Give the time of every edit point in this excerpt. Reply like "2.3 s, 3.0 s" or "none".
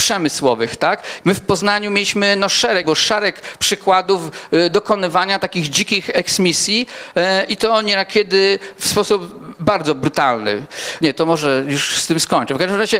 1.2 s, 2.8 s, 11.0 s